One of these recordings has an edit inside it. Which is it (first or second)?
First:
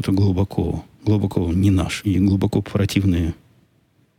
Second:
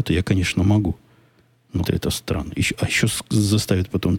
second